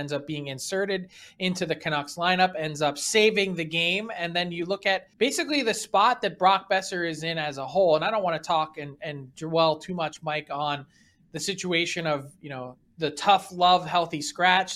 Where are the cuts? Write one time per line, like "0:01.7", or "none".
0:05.1